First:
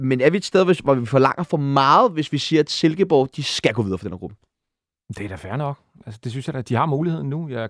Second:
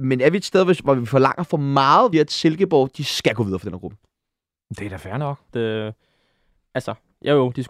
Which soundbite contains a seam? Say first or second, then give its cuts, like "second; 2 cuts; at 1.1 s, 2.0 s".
second; 2 cuts; at 2.1 s, 5.5 s